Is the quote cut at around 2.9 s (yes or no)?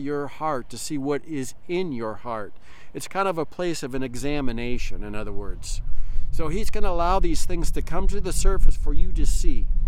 no